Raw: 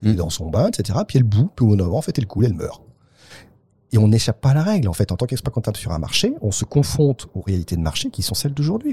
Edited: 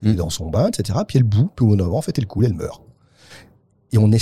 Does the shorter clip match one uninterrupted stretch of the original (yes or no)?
yes